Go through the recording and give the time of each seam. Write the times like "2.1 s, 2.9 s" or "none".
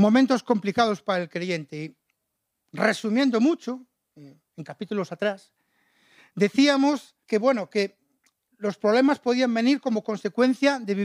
7.2 s